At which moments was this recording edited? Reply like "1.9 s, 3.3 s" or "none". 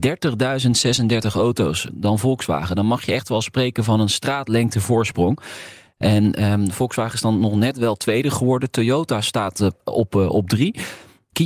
1.9 s